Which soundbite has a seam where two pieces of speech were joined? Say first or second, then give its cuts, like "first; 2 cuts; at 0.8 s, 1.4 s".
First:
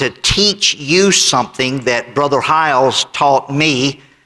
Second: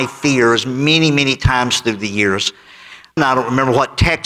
second; 1 cut; at 3.2 s